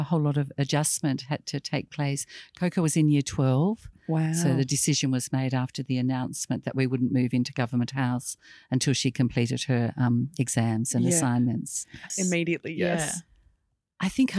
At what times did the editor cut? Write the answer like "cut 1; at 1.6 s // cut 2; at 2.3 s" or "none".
cut 1; at 12.1 s